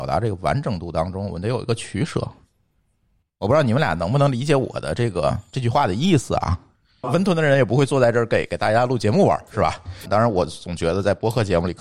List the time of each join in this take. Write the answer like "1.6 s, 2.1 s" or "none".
7.0 s, 10.1 s